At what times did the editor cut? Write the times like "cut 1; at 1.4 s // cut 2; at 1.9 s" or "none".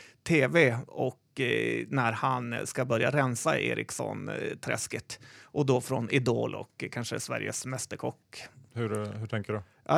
cut 1; at 8.7 s